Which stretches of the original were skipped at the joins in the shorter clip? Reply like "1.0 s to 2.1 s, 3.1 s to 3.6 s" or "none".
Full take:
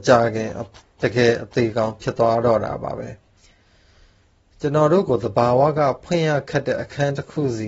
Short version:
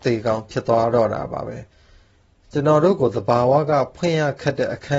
3.2 s to 3.8 s